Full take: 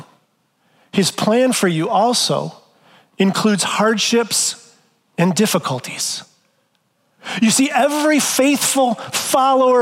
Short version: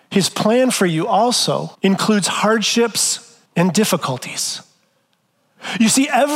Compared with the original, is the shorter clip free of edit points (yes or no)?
no